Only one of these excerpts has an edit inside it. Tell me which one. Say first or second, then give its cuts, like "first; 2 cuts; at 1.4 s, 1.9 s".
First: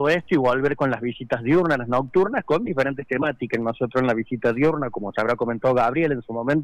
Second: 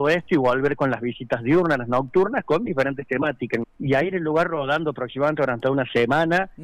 second; 1 cut; at 3.6 s